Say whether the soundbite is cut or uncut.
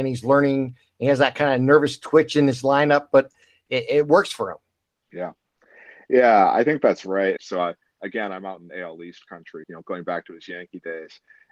cut